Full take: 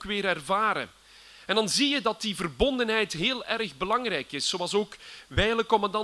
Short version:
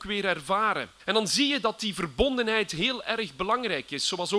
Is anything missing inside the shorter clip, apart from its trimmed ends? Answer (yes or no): yes